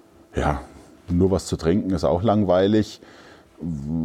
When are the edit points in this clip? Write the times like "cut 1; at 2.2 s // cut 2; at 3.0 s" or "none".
none